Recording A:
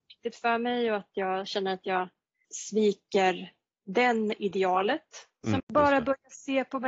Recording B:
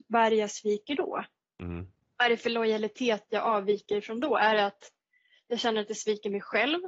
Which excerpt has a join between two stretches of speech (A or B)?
A